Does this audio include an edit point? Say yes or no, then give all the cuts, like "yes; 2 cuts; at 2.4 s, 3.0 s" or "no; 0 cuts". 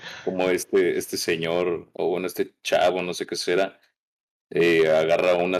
no; 0 cuts